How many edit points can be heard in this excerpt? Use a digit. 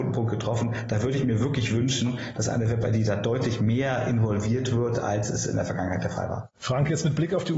1